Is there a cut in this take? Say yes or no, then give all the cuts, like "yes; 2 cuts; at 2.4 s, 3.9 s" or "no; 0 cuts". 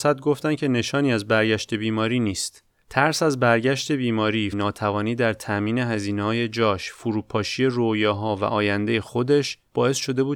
yes; 1 cut; at 4.5 s